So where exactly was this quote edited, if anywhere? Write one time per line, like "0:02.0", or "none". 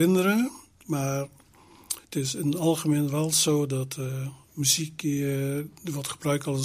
0:02.0